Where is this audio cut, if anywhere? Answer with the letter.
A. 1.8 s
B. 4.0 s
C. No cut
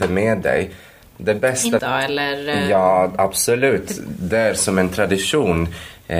A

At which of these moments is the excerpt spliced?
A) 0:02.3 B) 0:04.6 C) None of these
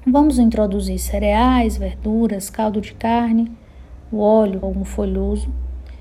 B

